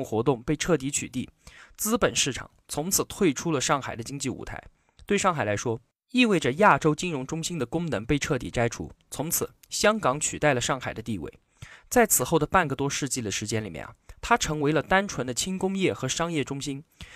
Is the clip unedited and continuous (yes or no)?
yes